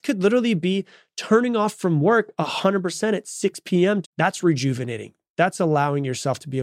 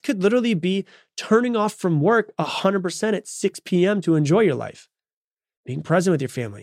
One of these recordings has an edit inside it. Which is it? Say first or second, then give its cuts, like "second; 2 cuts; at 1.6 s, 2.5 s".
first; 1 cut; at 4.0 s